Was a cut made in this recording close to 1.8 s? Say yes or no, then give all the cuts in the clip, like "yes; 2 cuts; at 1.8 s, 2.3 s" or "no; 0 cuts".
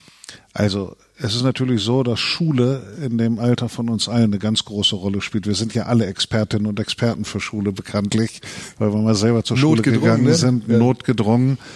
no; 0 cuts